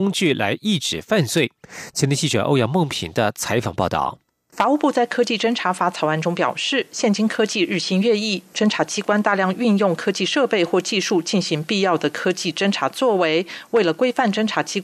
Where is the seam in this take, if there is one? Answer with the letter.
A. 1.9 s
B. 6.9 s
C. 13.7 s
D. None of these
D